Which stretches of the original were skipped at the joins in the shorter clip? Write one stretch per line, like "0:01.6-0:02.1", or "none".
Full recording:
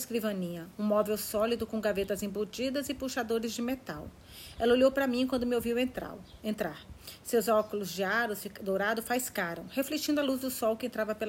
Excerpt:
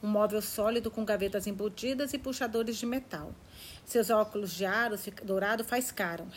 0:04.6-0:07.2